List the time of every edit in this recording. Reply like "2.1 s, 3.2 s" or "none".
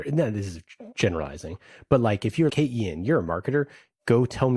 2.5 s